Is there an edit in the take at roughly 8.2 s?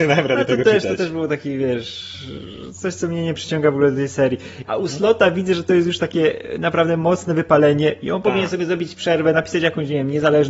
no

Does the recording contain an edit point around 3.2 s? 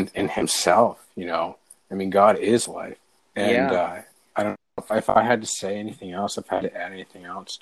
yes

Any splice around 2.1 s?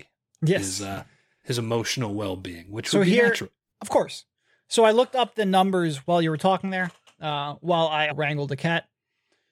no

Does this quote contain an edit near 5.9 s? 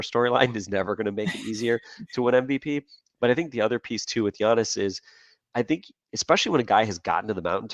no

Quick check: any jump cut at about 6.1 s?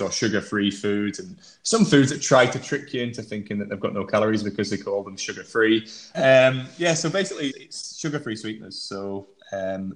yes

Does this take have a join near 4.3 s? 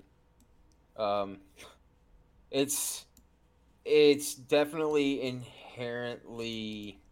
no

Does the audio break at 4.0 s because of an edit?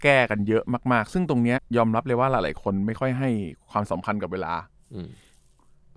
no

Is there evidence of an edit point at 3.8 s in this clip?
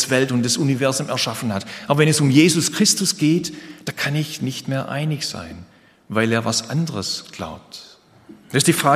no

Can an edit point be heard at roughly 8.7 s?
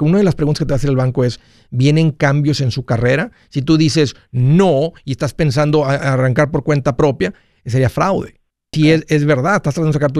yes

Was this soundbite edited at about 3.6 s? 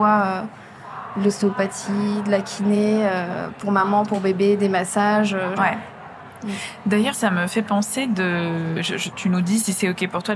no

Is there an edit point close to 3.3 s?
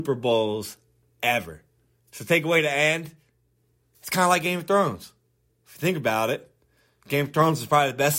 no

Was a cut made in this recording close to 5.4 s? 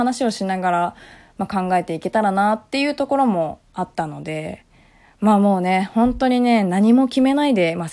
no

